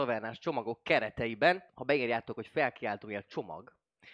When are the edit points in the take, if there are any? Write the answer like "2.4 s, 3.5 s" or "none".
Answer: 1.7 s